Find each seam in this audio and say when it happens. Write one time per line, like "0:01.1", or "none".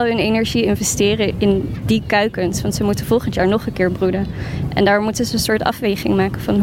0:01.3